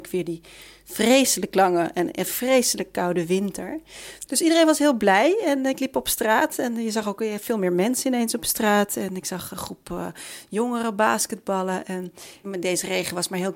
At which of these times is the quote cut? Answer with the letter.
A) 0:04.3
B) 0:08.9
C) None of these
A